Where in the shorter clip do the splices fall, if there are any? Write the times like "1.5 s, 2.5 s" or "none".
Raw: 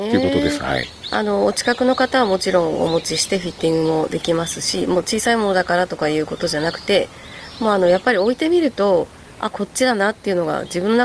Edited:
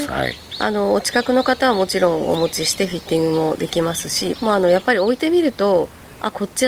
4.3 s